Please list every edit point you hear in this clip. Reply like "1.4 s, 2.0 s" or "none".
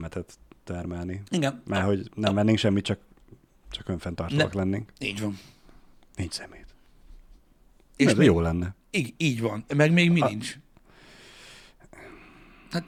none